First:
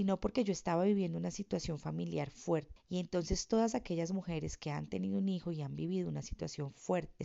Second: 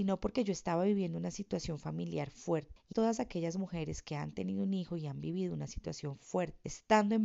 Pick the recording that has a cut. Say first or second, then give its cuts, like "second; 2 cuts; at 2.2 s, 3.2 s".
second; 1 cut; at 2.9 s